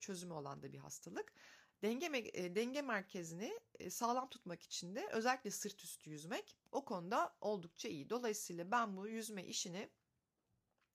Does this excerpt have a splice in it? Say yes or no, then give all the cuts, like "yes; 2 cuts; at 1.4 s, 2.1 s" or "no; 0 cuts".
no; 0 cuts